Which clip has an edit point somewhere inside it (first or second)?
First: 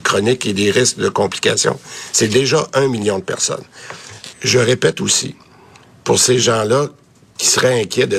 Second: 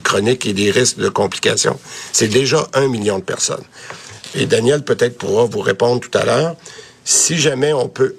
first